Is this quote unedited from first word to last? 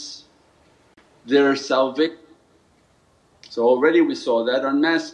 yes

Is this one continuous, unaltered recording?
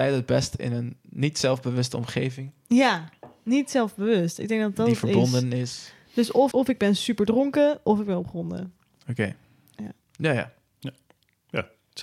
no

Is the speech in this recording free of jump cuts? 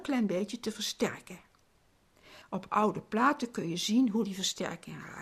yes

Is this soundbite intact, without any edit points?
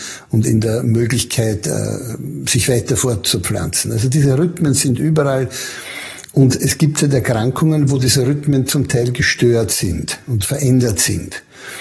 yes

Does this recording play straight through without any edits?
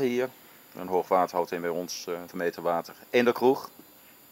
no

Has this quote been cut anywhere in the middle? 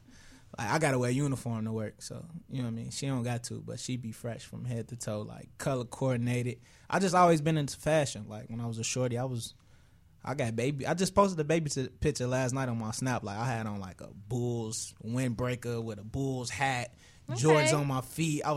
no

